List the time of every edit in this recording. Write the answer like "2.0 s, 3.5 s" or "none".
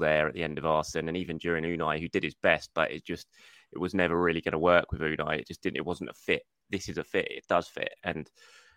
none